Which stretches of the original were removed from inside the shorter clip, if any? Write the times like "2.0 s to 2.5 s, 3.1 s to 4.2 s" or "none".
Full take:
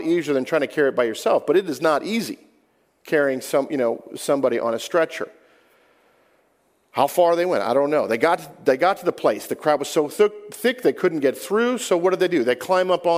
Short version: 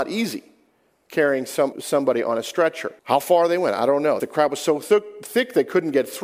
3.7 s to 4.1 s, 5.4 s to 6.9 s, 8.1 s to 9.5 s